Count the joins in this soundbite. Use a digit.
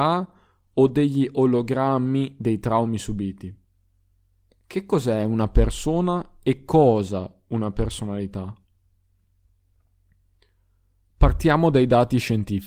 0